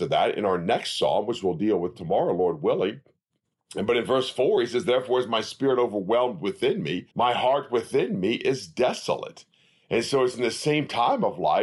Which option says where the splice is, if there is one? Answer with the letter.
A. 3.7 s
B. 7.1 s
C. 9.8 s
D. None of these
B